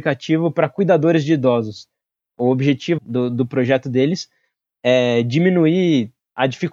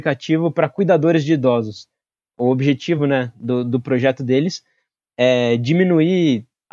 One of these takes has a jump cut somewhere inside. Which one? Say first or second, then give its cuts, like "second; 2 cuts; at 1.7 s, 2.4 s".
first; 1 cut; at 3.0 s